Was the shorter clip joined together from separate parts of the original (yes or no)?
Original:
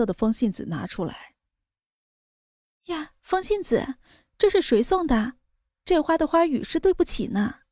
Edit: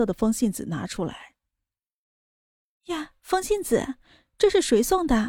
no